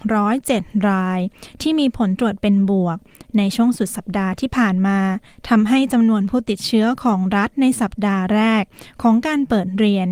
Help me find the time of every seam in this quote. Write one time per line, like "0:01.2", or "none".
none